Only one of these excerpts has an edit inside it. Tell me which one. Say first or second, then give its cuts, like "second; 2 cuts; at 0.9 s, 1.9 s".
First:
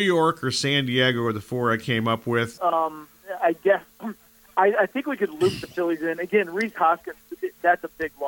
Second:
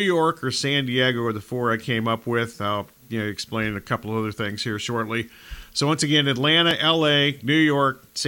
first; 1 cut; at 2.6 s